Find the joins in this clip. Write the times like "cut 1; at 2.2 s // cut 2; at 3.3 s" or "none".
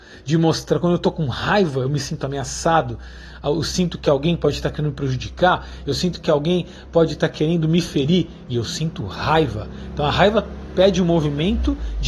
none